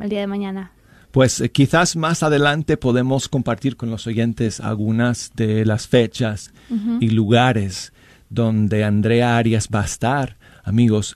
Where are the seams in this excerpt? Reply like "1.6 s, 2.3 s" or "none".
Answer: 3.8 s